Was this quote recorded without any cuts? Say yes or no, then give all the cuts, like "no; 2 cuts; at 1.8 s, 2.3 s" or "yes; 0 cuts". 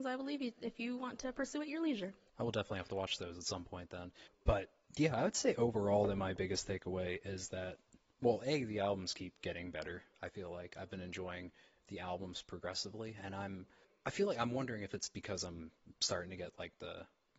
yes; 0 cuts